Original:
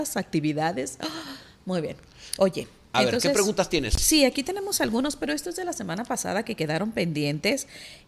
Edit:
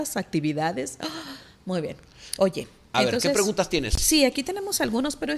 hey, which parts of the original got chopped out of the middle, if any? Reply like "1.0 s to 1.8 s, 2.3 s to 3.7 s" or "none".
none